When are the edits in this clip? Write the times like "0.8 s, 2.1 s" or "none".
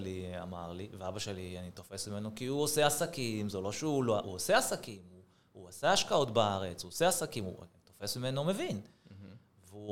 none